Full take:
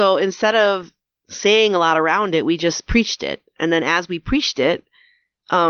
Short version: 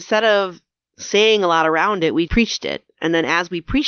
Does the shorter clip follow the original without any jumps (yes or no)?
no